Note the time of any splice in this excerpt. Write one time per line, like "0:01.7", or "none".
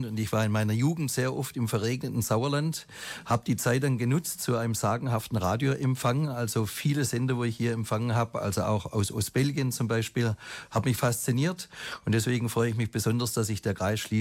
none